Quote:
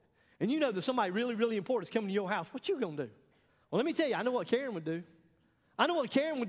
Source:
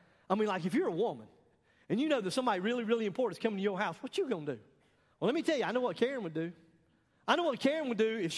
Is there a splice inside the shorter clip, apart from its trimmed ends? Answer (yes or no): no